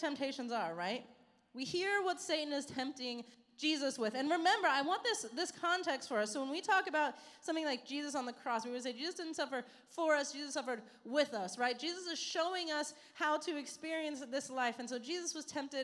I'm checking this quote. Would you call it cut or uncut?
uncut